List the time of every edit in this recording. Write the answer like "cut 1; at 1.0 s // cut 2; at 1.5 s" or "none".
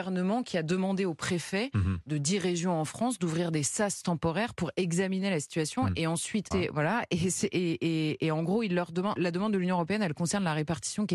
cut 1; at 6.5 s // cut 2; at 9.2 s

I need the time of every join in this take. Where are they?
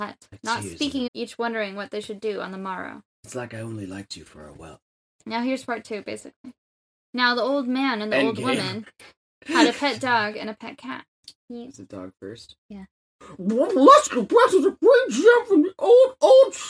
cut 1; at 1.1 s // cut 2; at 11.3 s

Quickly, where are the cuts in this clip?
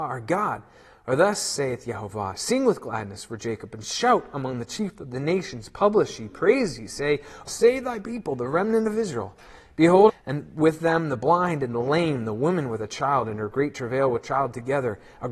cut 1; at 7.5 s // cut 2; at 10.1 s

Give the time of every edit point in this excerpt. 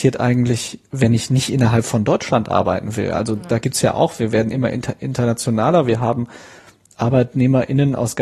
none

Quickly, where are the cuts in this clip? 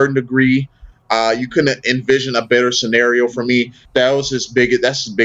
cut 1; at 0.9 s // cut 2; at 3.8 s

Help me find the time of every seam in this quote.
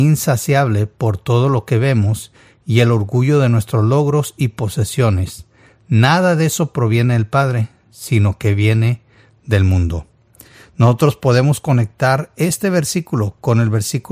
none

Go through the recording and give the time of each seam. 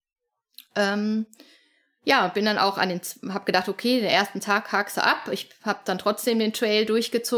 none

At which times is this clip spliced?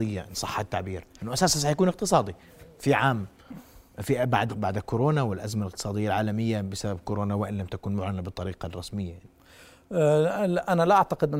cut 1; at 4.5 s

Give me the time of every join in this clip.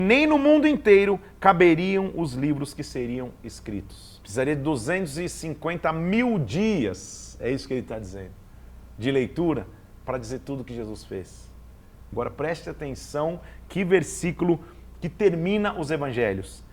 cut 1; at 4.2 s // cut 2; at 12.1 s

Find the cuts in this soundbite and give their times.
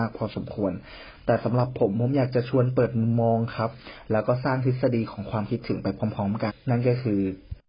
cut 1; at 6.5 s

